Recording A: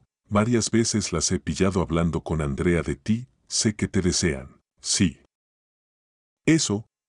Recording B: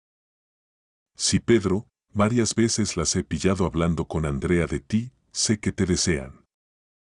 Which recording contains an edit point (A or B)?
A